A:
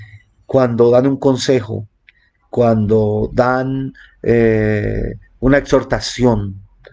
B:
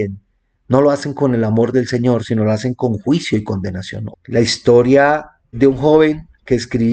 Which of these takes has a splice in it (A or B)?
B